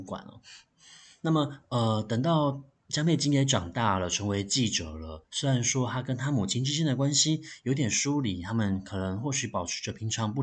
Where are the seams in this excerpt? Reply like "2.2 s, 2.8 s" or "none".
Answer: none